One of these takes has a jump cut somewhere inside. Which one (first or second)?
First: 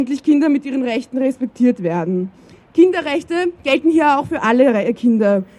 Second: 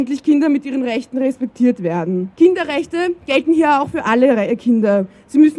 second